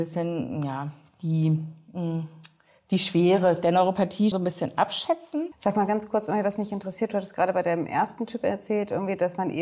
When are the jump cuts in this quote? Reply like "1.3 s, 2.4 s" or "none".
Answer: 4.3 s